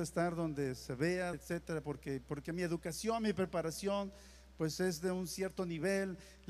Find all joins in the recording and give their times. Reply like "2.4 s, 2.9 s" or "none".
1.3 s